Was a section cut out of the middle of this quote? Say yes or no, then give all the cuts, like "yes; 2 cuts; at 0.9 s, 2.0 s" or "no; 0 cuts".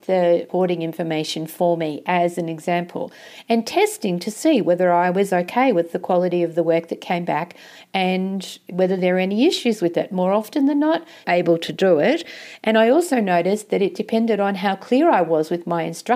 yes; 1 cut; at 11.2 s